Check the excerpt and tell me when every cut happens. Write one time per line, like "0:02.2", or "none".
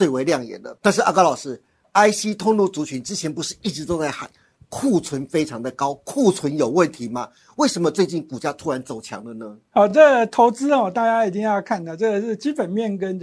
none